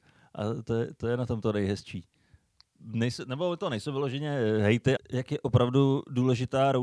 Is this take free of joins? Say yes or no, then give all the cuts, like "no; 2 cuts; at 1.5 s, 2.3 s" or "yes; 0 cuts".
no; 2 cuts; at 2.6 s, 5.0 s